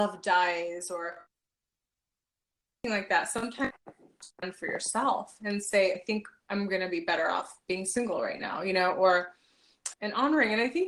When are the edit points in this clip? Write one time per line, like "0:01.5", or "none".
0:05.9
0:09.9

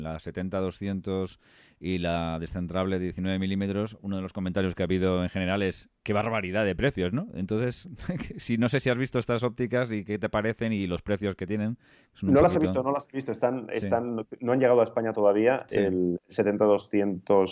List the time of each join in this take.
none

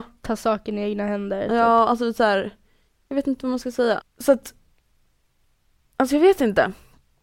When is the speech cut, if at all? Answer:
0:03.0
0:04.0

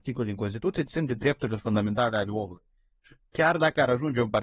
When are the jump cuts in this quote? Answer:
none

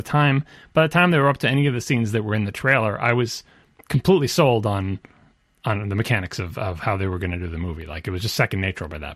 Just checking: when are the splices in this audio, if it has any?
none

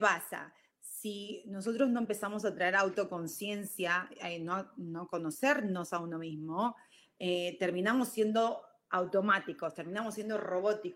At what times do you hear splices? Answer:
none

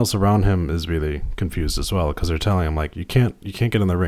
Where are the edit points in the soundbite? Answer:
none

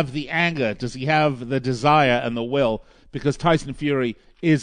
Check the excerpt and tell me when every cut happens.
none

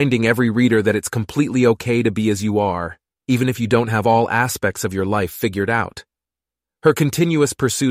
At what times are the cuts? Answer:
none

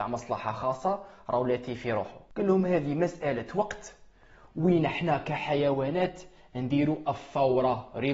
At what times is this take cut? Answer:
none

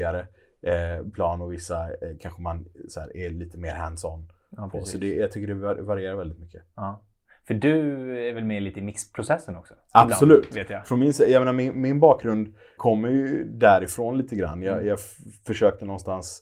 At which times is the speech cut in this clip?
0:12.8

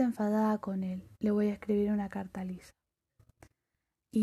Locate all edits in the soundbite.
none

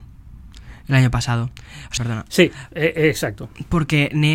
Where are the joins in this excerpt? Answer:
0:02.0

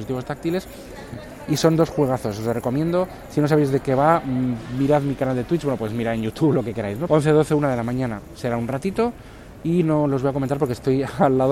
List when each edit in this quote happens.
0:07.1

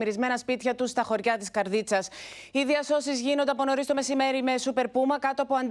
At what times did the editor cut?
none

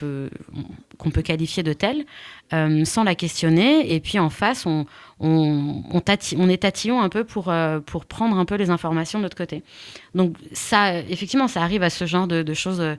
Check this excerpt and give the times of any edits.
none

